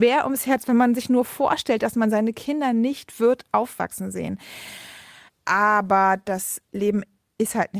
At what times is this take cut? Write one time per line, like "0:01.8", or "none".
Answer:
0:05.3